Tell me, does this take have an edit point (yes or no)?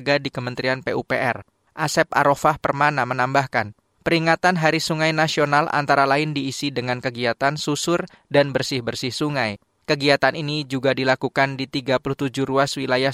no